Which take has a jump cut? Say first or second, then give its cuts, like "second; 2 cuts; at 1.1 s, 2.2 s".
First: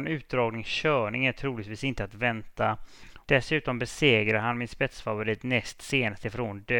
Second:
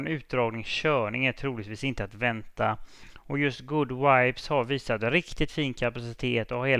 first; 1 cut; at 3.2 s